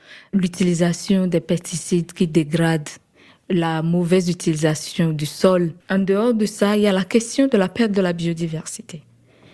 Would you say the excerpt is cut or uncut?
cut